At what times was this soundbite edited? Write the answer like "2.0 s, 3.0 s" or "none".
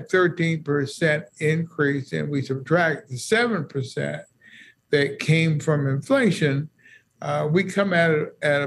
none